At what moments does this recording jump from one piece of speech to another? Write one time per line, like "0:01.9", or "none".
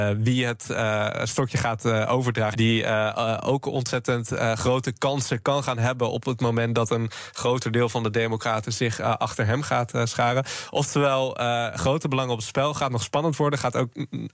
0:02.5